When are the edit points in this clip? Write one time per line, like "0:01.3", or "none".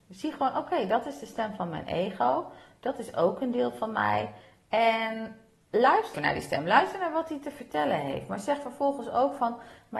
0:06.1